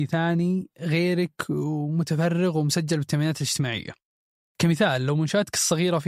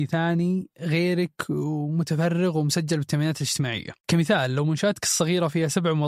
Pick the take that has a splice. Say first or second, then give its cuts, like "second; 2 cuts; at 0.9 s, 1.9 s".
second; 1 cut; at 4.0 s